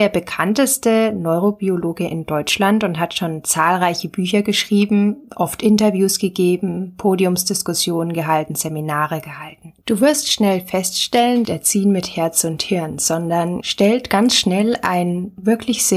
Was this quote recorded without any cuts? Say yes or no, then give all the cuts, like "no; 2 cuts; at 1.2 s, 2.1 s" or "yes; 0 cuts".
no; 3 cuts; at 9.8 s, 11.4 s, 13.6 s